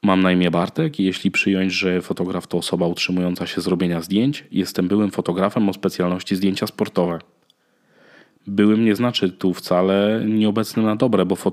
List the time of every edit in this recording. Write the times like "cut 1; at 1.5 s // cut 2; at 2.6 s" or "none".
none